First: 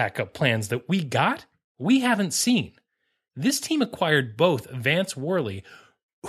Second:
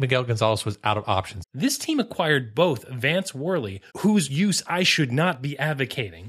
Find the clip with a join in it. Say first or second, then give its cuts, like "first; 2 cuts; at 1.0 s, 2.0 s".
second; 2 cuts; at 1.4 s, 3.9 s